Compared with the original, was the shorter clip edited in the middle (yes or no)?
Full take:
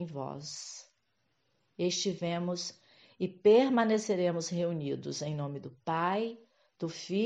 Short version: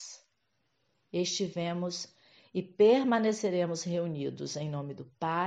no